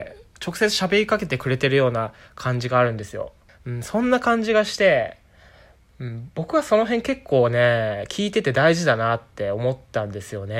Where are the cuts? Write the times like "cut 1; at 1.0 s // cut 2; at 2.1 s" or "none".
cut 1; at 3.5 s